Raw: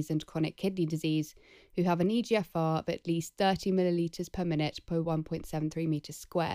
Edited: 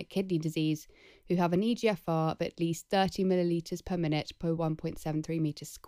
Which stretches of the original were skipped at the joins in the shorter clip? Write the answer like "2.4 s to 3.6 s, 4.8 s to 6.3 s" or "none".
none

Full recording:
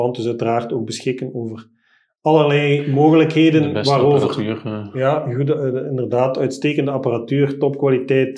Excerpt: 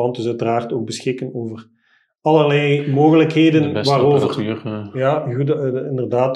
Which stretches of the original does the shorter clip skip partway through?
none

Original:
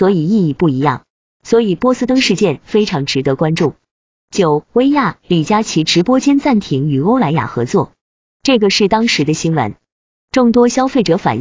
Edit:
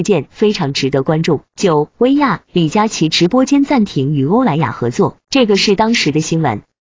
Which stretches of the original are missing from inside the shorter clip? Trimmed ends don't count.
3.8 s to 4.2 s, 7.9 s to 8.3 s

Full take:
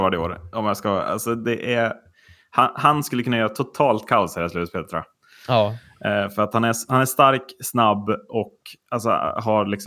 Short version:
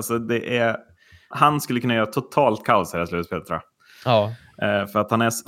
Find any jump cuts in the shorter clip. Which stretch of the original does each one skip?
2.5 s to 2.7 s

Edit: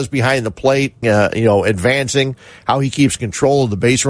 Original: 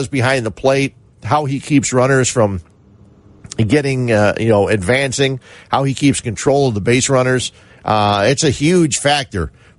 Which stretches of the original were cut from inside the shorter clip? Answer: 1.0 s to 4.1 s

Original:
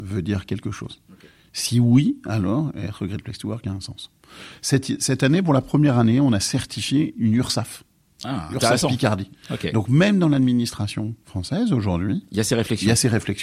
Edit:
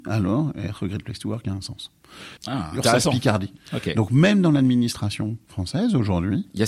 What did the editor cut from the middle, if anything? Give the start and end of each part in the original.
4.6 s to 8.1 s

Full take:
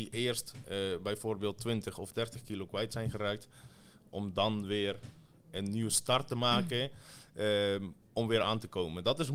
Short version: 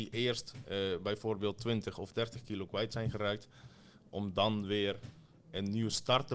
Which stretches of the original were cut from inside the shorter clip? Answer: none

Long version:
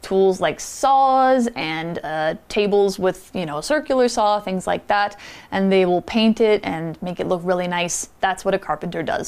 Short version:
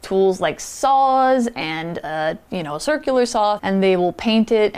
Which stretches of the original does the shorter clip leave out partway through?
2.5 s to 3.3 s, 4.4 s to 5.5 s

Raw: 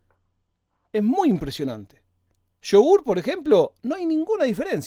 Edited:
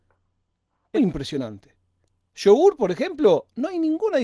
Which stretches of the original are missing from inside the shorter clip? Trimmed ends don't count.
1.0 s to 1.2 s

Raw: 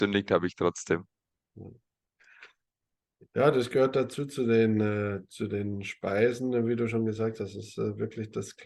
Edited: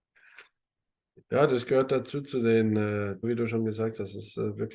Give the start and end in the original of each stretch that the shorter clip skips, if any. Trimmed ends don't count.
5.3 s to 6.6 s

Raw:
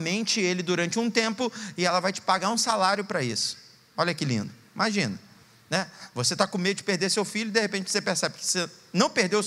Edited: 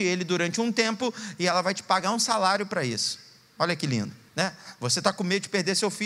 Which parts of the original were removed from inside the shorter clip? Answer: 4.7 s to 5.6 s

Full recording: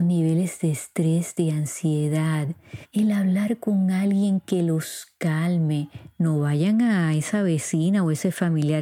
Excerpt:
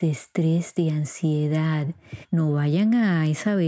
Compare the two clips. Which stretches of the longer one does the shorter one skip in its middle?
2.9 s to 6.1 s

